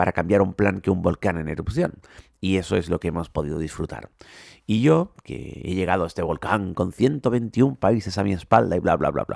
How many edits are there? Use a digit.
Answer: 0